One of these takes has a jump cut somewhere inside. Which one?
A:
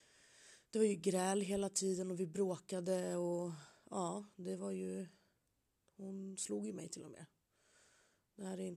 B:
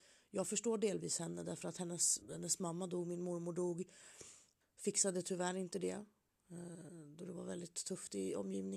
B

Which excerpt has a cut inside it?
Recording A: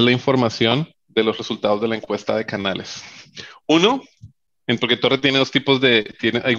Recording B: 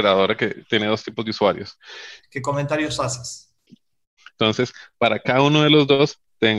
B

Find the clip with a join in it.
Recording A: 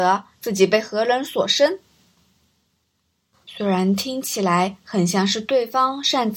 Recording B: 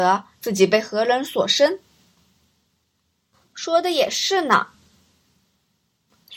A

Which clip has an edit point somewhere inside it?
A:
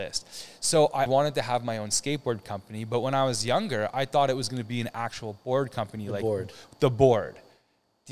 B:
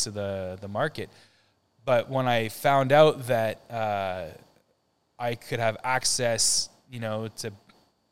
A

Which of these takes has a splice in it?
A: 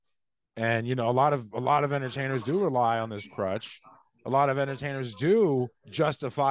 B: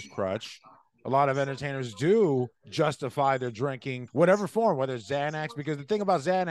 B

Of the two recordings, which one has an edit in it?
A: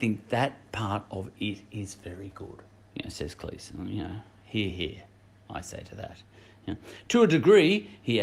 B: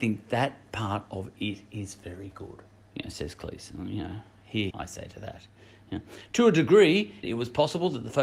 B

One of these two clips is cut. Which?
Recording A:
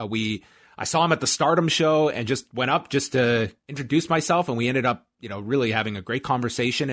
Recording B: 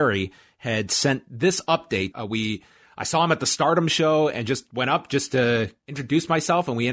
B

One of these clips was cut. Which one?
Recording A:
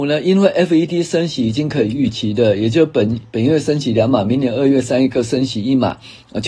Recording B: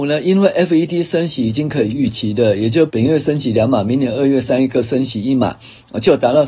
B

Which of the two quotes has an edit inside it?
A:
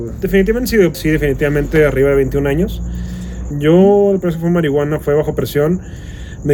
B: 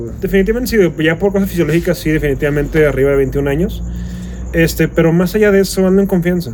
A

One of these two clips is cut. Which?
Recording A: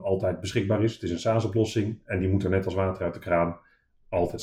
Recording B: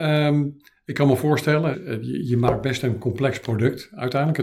B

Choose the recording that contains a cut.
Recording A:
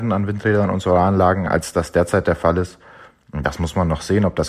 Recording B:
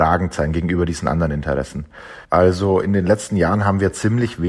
B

